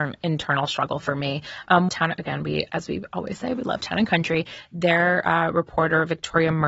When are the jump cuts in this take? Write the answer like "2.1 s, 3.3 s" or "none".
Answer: 1.9 s